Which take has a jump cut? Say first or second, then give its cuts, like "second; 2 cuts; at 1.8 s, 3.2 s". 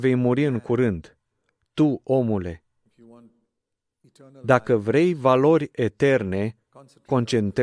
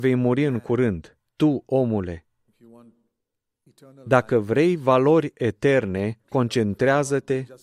second; 2 cuts; at 1.3 s, 6.2 s